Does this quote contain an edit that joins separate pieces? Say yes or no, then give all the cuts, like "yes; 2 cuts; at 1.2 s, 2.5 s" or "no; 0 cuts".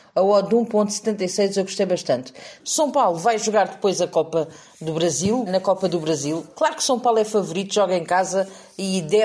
yes; 2 cuts; at 2.6 s, 5.5 s